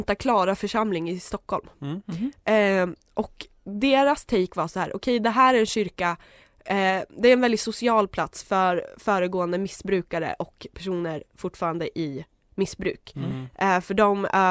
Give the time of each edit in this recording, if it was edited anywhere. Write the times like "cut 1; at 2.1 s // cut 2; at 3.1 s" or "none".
none